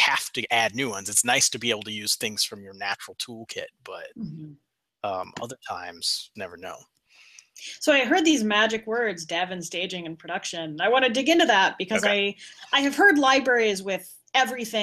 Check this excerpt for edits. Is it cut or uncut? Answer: cut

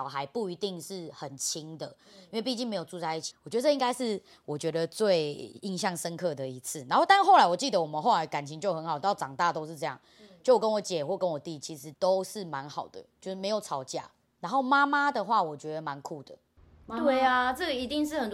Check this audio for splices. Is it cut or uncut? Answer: cut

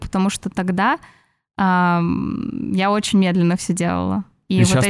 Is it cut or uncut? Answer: uncut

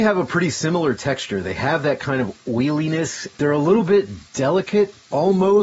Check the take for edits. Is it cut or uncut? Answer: uncut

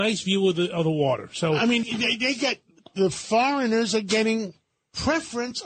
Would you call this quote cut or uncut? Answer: cut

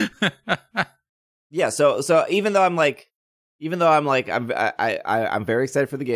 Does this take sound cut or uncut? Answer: uncut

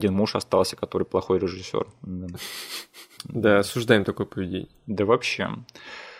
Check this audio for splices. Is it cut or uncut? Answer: cut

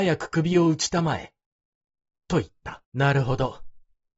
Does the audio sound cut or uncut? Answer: cut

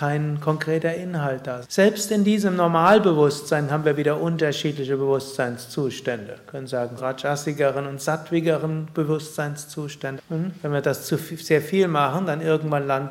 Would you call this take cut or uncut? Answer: cut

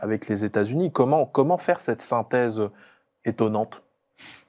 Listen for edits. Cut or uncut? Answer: uncut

